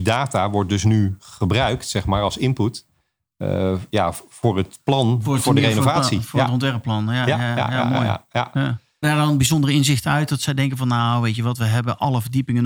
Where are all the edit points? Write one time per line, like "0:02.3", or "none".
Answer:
0:09.0